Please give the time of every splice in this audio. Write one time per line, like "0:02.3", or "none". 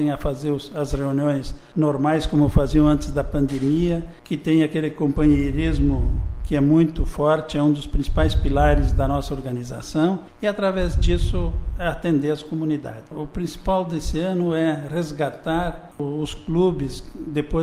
0:13.0